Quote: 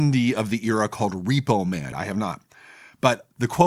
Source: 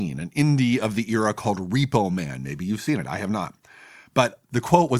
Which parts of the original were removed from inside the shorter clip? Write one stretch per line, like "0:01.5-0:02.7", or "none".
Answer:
0:02.4-0:03.0